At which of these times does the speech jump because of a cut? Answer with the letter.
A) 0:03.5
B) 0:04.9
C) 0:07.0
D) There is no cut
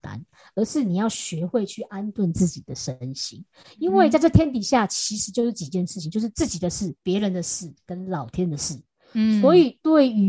C